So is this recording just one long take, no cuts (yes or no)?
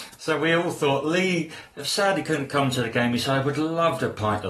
yes